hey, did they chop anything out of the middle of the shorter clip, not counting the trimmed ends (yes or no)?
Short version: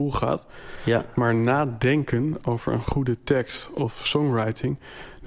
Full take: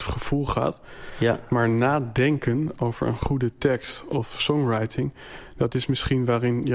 no